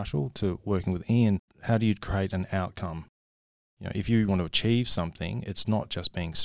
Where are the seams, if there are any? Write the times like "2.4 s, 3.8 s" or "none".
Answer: 1.5 s, 4.3 s